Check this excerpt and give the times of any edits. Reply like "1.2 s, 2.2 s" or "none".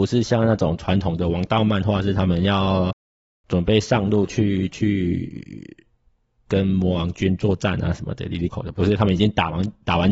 8.5 s

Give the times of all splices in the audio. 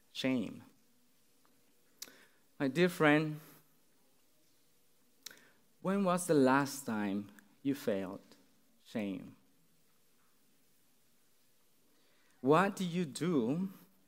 none

